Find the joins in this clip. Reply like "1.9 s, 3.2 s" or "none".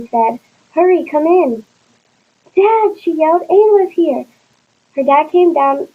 none